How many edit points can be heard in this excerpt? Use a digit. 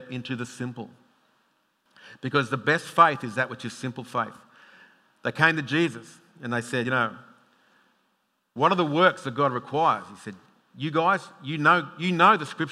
0